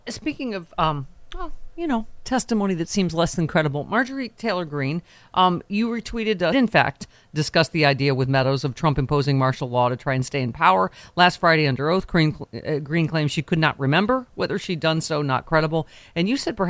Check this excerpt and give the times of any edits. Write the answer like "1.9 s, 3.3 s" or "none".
6.5 s